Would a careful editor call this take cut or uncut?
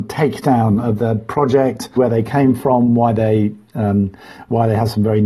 cut